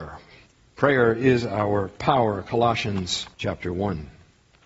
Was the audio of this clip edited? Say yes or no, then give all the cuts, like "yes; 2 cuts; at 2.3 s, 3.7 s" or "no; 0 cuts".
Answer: yes; 1 cut; at 3.3 s